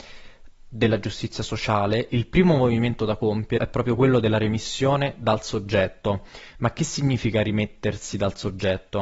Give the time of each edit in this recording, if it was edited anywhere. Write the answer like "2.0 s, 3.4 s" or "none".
3.6 s